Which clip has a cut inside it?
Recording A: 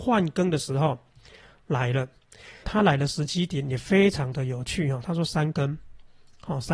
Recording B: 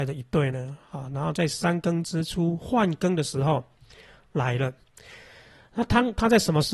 A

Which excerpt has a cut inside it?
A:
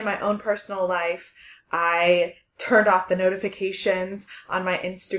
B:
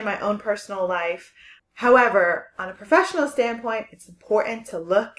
B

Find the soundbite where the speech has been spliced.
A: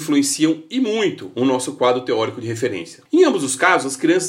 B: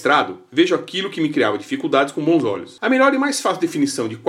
A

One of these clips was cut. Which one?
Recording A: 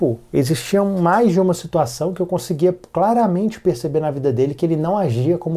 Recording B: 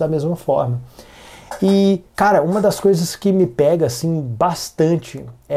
B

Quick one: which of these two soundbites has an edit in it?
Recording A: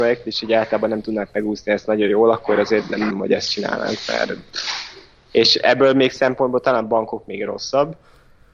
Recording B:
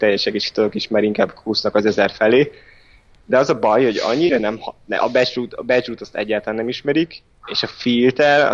A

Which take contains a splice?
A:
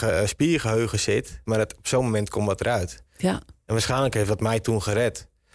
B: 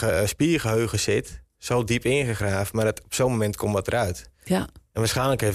A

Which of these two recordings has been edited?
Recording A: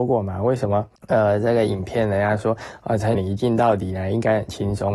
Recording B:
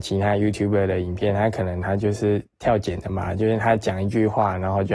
A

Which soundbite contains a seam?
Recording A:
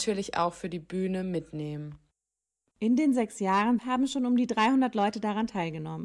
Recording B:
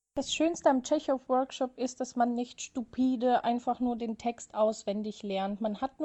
A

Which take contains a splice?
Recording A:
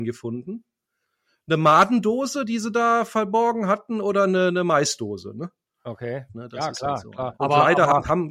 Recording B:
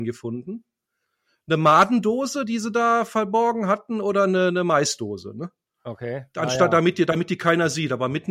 A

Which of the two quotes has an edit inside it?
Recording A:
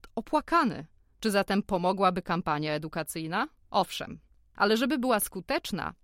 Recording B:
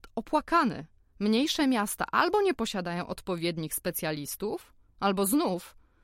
A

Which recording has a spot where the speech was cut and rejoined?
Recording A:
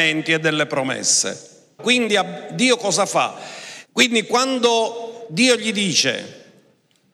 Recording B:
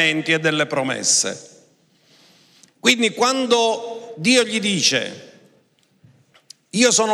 A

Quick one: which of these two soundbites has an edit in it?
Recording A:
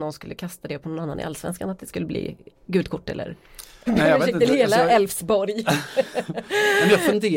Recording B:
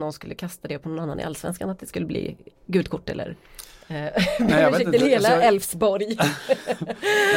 A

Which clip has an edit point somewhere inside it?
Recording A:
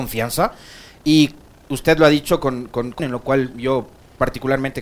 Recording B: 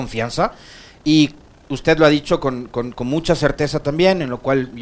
A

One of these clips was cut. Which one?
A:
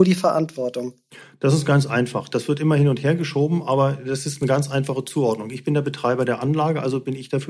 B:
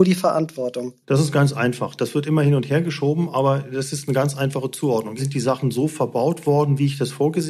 B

